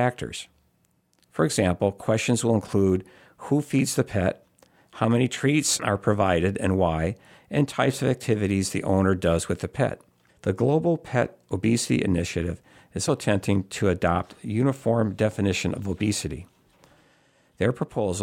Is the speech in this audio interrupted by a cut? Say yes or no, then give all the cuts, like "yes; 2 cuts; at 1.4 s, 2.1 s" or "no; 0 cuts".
yes; 2 cuts; at 10.3 s, 13.1 s